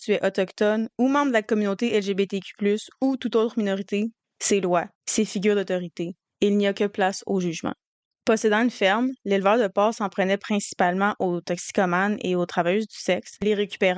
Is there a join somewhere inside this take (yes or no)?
yes